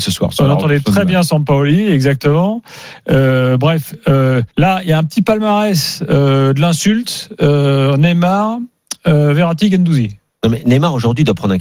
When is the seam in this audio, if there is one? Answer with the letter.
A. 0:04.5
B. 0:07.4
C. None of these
A